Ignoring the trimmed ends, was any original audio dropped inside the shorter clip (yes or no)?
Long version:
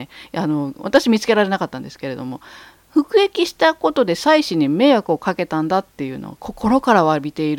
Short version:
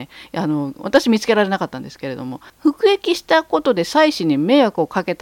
yes